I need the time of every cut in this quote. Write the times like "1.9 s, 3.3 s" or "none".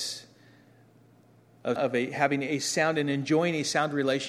1.8 s